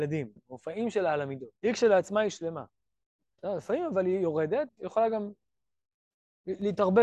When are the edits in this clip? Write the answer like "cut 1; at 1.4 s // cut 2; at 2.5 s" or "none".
cut 1; at 1.6 s // cut 2; at 4.7 s